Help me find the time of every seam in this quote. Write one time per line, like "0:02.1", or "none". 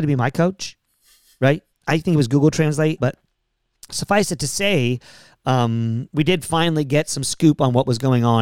0:01.7
0:03.0